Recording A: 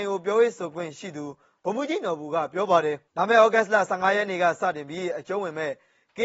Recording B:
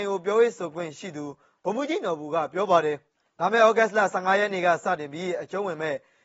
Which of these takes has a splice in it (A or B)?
A